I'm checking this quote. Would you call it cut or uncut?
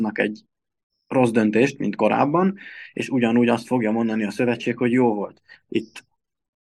cut